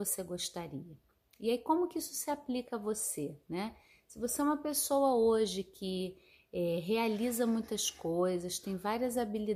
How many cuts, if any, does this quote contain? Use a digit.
0